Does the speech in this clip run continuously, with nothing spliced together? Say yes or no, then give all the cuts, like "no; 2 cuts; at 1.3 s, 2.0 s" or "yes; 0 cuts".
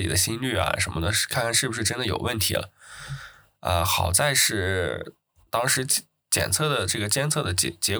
yes; 0 cuts